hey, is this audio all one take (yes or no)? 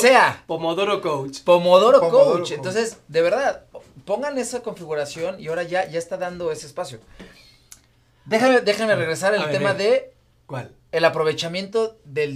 yes